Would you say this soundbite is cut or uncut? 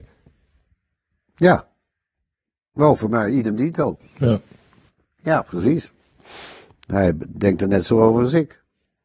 uncut